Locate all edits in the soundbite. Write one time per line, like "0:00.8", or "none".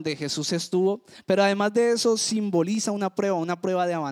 none